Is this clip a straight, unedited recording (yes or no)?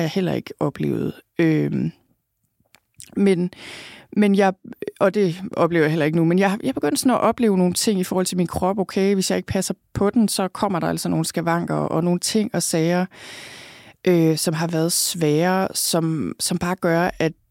yes